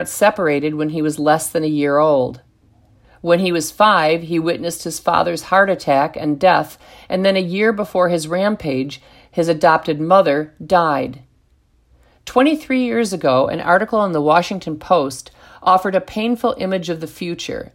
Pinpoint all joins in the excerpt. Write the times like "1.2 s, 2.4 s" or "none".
3.0 s